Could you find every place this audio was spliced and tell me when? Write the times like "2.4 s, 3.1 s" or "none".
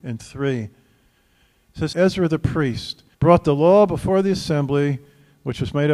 1.9 s, 3.1 s